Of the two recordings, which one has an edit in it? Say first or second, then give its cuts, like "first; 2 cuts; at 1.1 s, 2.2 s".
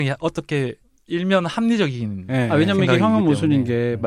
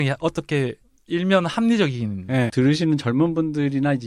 second; 1 cut; at 2.5 s